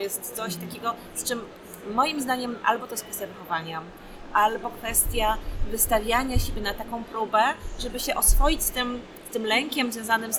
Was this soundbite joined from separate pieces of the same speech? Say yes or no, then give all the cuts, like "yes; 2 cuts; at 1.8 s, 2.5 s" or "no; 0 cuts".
no; 0 cuts